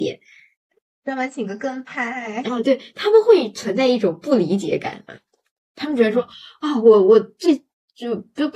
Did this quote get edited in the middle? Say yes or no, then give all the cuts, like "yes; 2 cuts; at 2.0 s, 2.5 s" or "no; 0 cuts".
no; 0 cuts